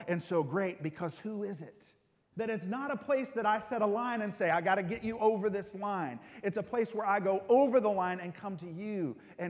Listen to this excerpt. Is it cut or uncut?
cut